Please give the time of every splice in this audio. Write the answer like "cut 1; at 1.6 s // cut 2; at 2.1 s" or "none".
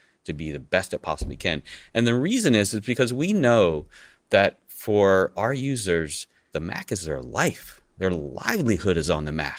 cut 1; at 6.5 s

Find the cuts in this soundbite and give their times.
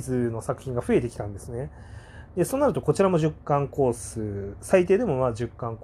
cut 1; at 2.3 s

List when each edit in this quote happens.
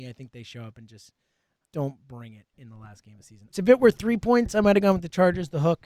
cut 1; at 1.6 s // cut 2; at 3.5 s

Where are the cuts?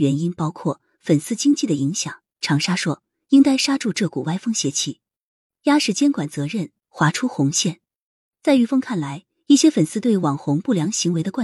cut 1; at 2.3 s

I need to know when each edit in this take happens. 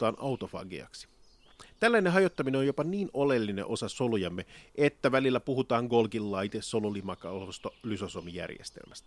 none

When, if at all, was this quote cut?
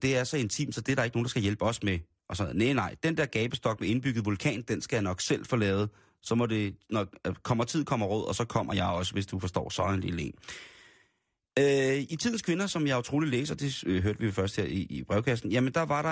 none

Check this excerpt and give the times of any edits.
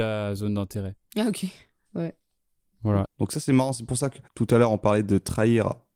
cut 1; at 3.0 s // cut 2; at 4.2 s

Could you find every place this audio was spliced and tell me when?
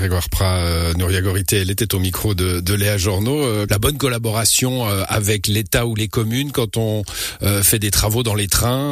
cut 1; at 3.7 s

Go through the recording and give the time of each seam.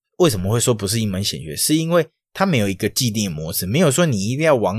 none

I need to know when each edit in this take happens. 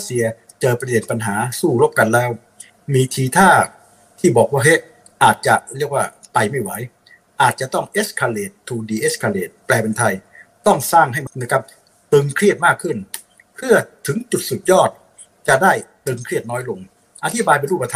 cut 1; at 11.3 s

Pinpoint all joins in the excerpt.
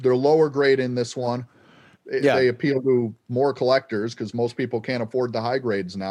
cut 1; at 1.9 s

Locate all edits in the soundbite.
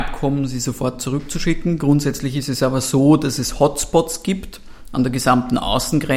none

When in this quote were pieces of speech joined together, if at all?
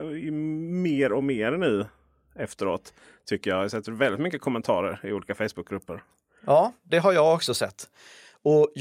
cut 1; at 6.9 s

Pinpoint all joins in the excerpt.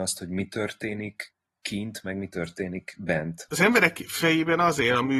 cut 1; at 3.5 s

